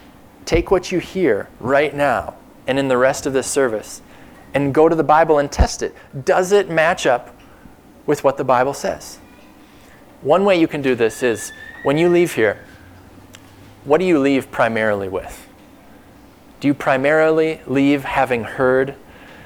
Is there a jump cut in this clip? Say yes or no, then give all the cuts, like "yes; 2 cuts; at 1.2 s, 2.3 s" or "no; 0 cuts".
no; 0 cuts